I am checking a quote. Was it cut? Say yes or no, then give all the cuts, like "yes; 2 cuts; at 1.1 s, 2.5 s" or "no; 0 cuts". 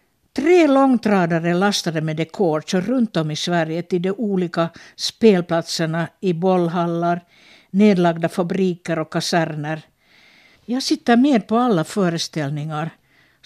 yes; 1 cut; at 10.6 s